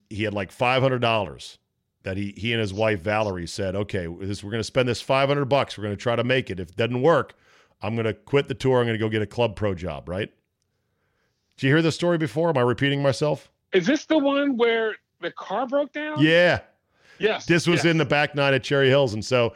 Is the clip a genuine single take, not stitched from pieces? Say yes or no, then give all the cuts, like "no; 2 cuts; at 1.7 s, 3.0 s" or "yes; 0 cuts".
yes; 0 cuts